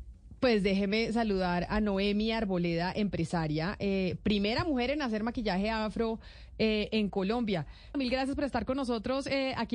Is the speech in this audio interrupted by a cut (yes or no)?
yes